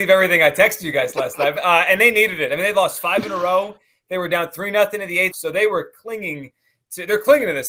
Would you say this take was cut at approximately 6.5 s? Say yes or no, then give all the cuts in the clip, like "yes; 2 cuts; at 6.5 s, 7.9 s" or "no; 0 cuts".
no; 2 cuts; at 1.6 s, 5.3 s